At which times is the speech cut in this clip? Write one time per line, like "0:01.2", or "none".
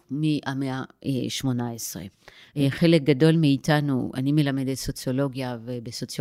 0:02.4